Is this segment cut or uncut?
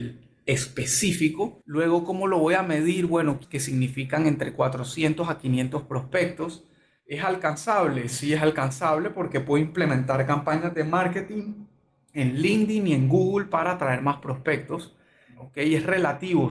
cut